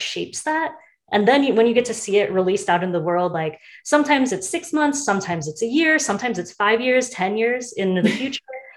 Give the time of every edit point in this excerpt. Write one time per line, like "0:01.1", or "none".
none